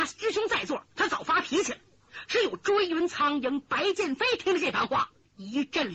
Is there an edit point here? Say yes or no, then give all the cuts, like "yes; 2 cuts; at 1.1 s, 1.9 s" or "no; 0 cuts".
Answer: no; 0 cuts